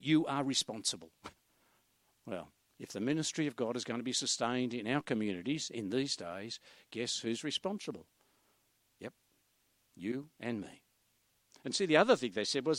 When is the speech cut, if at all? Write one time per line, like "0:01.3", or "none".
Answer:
none